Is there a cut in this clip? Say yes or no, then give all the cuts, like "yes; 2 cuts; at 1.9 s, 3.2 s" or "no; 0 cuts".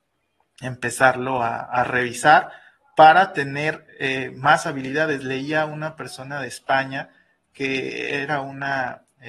no; 0 cuts